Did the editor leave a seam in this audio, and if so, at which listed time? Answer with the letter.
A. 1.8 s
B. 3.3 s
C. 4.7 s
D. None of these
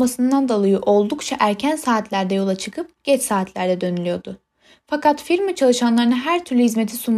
D